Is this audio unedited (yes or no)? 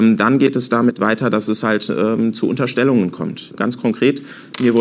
yes